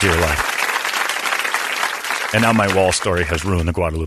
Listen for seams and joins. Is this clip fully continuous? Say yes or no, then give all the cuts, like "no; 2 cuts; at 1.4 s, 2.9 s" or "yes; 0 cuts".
yes; 0 cuts